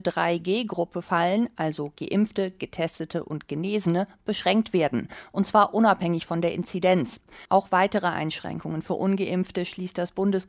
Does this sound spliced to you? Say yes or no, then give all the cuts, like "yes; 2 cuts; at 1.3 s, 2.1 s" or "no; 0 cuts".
no; 0 cuts